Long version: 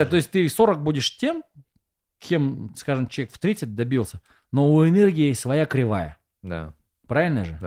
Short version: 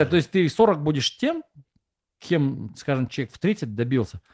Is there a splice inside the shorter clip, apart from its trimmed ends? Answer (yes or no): no